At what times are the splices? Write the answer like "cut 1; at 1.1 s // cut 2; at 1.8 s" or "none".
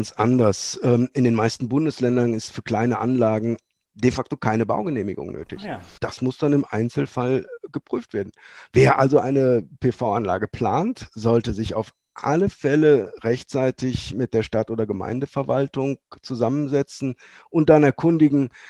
cut 1; at 6.0 s